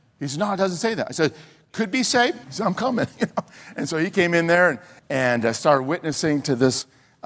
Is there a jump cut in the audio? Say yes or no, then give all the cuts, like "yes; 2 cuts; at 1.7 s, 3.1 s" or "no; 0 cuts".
yes; 2 cuts; at 2.4 s, 5.0 s